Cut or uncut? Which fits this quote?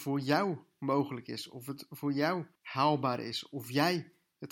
cut